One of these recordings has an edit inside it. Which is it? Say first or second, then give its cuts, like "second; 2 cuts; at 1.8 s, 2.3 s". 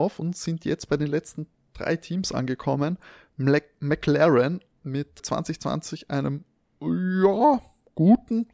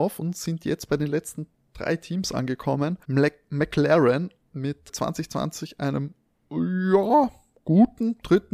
second; 1 cut; at 3.0 s